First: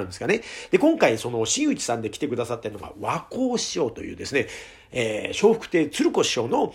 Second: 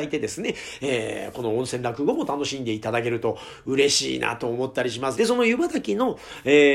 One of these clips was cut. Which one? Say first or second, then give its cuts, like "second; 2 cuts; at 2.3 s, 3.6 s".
second; 1 cut; at 5.1 s